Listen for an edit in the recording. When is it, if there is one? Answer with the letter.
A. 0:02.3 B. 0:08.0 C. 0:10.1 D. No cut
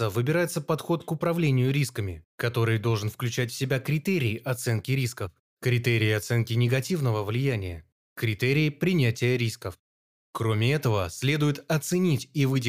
D